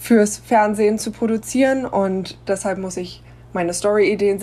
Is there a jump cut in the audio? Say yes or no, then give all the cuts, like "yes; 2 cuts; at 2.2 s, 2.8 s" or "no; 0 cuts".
no; 0 cuts